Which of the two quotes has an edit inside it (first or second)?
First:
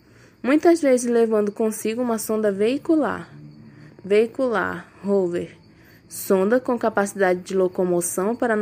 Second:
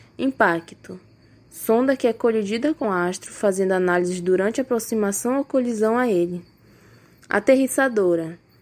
second